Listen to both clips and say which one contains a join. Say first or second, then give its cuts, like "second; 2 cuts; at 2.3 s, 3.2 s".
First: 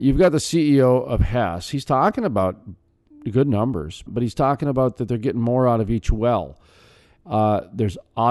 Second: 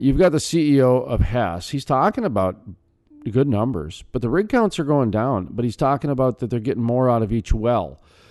first; 1 cut; at 4.1 s